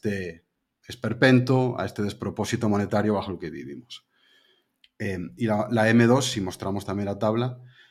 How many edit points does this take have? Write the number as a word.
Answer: one